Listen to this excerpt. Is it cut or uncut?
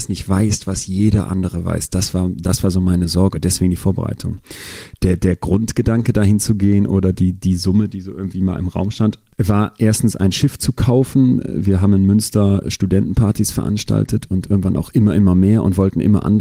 uncut